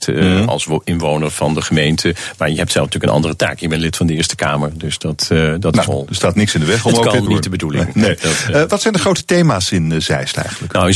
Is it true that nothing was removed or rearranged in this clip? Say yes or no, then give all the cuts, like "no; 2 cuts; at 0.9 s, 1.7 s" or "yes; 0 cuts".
no; 1 cut; at 5.9 s